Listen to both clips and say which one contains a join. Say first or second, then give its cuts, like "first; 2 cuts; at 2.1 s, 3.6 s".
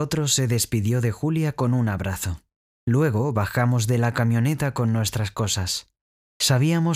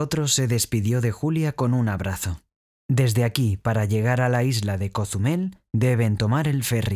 second; 1 cut; at 2.7 s